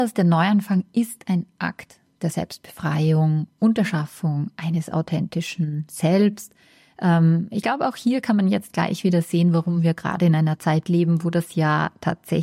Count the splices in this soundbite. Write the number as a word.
zero